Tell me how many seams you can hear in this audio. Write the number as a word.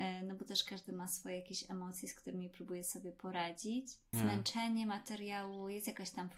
one